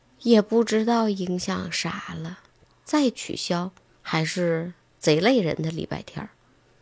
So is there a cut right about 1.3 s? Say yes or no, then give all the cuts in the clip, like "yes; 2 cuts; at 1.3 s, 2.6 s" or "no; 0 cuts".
no; 2 cuts; at 2.7 s, 3.9 s